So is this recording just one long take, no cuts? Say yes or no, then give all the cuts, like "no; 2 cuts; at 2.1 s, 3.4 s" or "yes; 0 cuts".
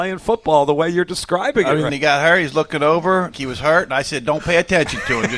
no; 2 cuts; at 1.9 s, 3.3 s